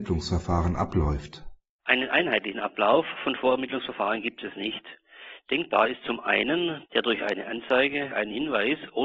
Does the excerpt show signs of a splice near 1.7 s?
no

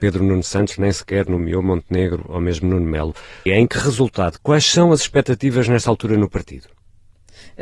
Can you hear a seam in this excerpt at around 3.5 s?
yes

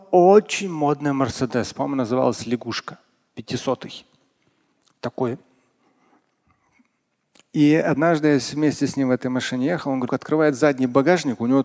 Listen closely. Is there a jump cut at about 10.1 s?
yes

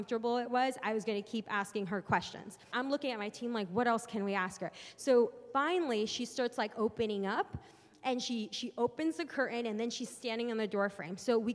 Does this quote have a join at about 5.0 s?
no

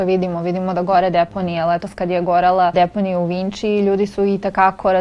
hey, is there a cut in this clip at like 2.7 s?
yes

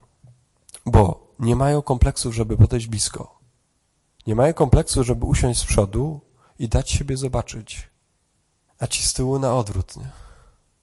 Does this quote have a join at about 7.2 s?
no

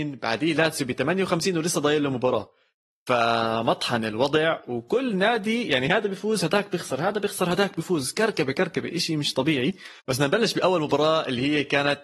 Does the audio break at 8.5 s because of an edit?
yes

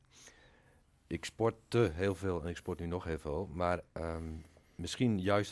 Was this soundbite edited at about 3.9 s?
no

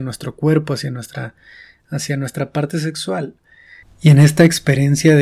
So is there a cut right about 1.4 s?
no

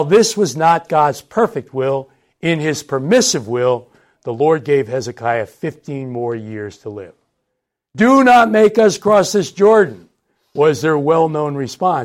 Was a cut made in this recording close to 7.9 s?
yes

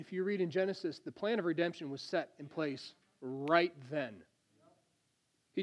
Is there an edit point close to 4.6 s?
no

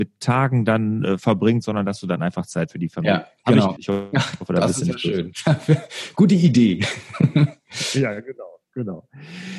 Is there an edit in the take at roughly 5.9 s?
no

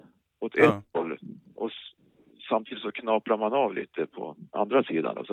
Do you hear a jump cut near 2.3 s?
yes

